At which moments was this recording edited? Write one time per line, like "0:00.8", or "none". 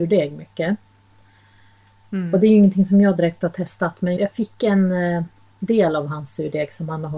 0:04.2